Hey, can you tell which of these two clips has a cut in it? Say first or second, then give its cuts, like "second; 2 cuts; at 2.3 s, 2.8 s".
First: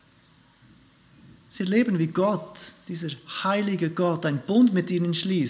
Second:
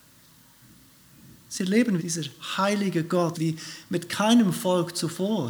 second; 2 cuts; at 2.0 s, 3.3 s